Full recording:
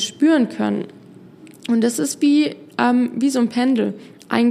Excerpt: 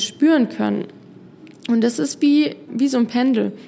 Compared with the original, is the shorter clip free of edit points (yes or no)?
no